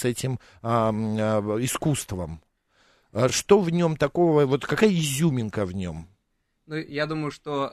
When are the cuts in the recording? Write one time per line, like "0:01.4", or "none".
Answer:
none